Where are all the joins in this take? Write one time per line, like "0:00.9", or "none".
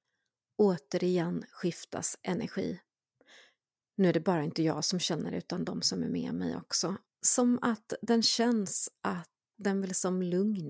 0:07.1
0:09.5